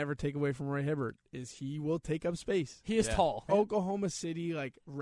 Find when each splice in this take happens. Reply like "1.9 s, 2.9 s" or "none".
3.5 s